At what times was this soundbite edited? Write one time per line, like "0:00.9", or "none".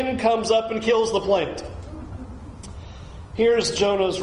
none